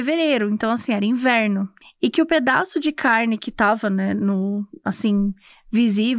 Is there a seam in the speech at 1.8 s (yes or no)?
yes